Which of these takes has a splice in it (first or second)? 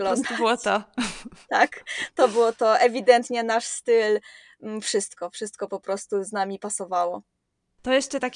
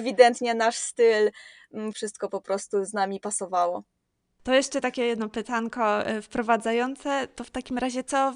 second